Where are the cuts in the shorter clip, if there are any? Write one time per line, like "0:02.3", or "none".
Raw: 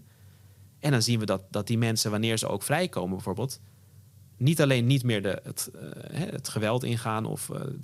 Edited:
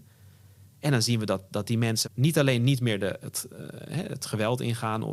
0:02.0